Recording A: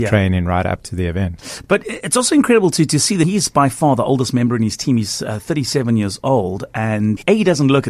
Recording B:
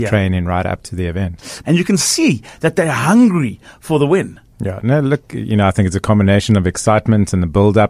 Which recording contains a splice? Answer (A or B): B